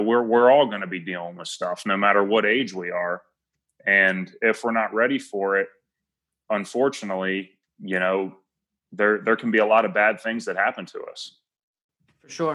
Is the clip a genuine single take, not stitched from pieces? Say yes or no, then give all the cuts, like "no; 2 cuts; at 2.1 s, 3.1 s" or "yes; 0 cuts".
yes; 0 cuts